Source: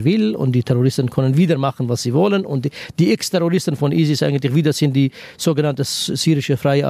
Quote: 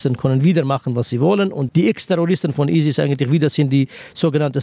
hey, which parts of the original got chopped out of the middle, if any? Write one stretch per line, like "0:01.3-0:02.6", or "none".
0:02.6-0:02.9